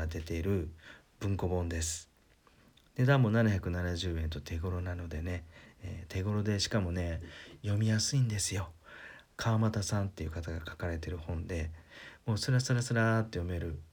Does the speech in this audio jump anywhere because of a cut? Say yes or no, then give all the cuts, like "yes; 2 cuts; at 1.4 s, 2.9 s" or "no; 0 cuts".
yes; 1 cut; at 9.3 s